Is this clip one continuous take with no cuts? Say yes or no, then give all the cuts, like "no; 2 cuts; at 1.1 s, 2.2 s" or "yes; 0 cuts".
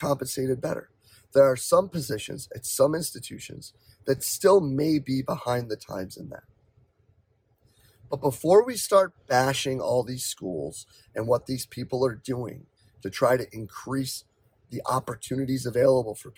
yes; 0 cuts